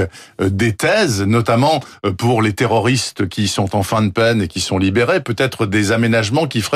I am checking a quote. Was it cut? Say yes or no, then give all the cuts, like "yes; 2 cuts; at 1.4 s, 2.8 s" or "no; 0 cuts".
no; 0 cuts